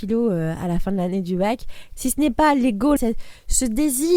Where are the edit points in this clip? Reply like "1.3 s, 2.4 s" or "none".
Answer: 2.0 s, 3.0 s